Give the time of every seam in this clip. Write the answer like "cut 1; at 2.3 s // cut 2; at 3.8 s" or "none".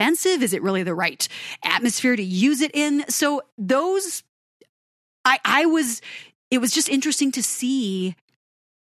none